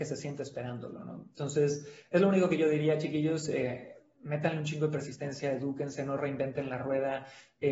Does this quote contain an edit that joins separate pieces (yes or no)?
no